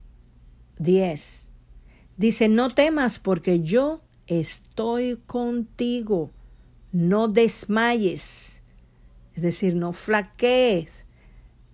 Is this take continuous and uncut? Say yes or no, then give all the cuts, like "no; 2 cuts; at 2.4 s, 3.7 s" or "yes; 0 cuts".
yes; 0 cuts